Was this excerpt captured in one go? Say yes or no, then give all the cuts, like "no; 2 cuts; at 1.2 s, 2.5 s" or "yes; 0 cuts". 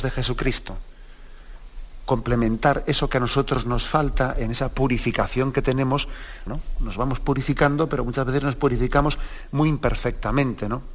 no; 1 cut; at 6.5 s